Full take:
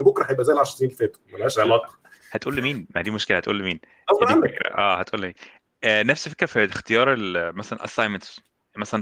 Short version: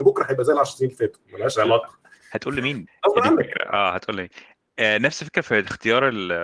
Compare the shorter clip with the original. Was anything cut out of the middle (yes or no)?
yes